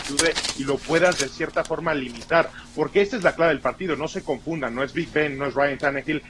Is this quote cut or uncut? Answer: uncut